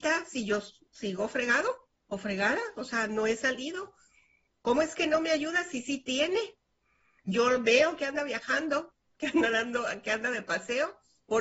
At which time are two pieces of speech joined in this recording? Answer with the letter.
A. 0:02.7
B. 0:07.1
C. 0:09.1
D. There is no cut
D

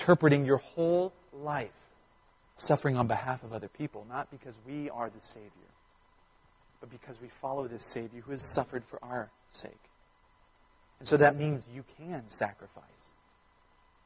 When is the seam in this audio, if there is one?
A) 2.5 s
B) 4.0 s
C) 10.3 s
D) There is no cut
A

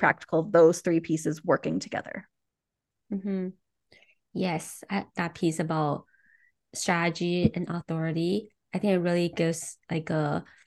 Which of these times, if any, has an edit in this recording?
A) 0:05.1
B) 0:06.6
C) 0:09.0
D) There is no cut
A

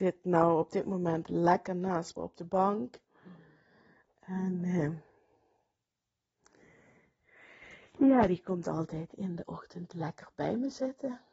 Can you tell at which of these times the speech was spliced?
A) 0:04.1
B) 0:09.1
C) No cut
B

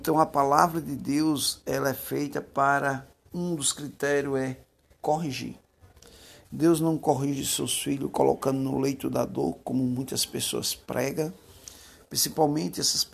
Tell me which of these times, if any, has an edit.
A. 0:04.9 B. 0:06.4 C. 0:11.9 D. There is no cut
B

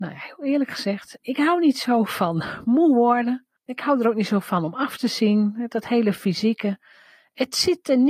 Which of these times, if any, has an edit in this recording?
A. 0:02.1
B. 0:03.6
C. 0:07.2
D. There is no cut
B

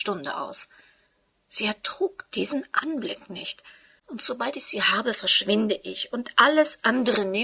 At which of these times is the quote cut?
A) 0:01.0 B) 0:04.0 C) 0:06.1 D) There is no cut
B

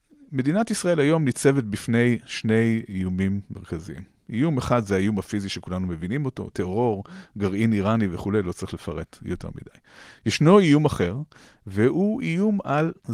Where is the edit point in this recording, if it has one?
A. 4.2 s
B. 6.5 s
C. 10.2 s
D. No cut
B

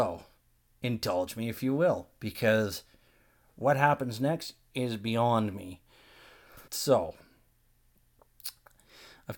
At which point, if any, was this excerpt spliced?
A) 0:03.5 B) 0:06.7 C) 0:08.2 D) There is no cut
B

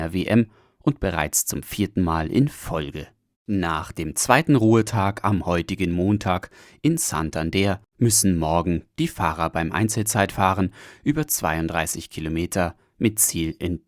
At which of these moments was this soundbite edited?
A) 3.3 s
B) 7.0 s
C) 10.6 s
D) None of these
A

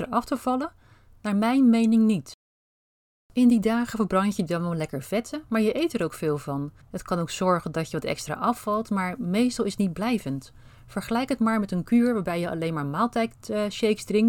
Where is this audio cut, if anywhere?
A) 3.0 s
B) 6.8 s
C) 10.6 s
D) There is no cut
B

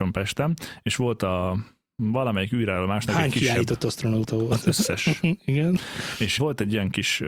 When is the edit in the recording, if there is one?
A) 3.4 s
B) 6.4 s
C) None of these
B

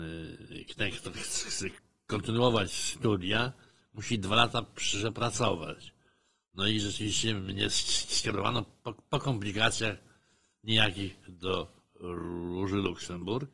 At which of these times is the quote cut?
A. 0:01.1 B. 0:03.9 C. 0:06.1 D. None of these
A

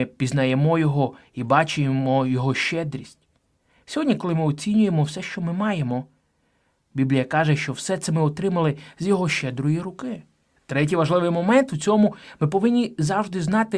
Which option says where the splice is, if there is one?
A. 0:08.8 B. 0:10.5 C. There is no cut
B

